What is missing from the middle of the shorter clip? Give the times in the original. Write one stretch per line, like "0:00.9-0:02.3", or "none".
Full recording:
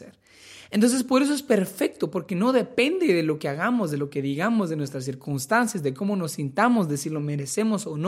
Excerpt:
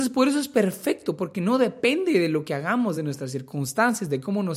0:03.9-0:04.7